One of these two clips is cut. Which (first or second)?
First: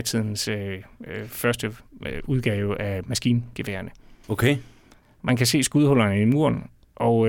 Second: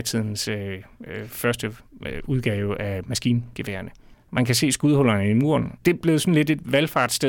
second